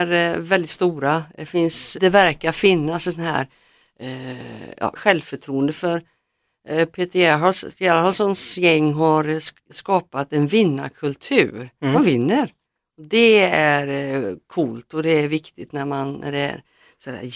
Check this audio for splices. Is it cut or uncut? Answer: cut